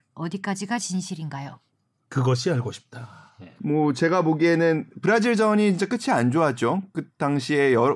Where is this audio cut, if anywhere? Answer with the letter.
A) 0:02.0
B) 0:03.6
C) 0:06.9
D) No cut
B